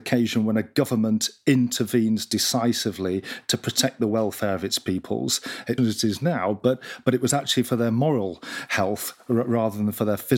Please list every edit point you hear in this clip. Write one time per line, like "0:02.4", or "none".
0:05.8